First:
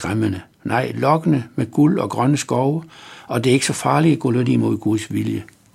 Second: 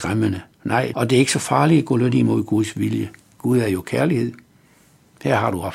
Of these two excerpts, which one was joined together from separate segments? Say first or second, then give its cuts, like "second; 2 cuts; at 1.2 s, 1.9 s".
second; 1 cut; at 0.9 s